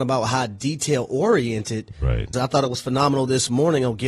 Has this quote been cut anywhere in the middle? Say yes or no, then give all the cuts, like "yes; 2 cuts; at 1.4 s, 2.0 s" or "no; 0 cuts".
yes; 1 cut; at 2.3 s